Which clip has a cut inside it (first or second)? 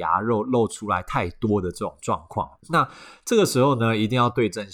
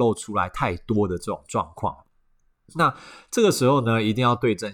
first